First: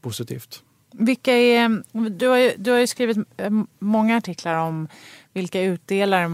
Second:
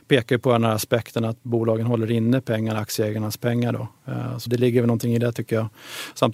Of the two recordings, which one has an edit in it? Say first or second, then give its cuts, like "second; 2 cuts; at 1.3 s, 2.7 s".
second; 1 cut; at 4.5 s